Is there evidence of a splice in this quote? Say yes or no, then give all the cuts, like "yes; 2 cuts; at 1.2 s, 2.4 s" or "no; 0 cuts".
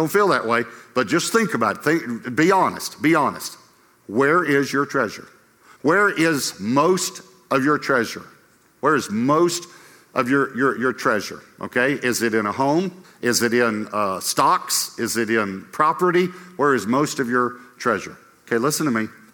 no; 0 cuts